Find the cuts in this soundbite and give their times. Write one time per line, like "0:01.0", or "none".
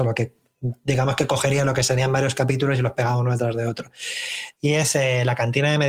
0:04.6